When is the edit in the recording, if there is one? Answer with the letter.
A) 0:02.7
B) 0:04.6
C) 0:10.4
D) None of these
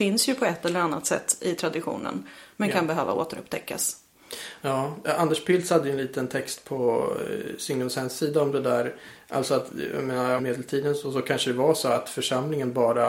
C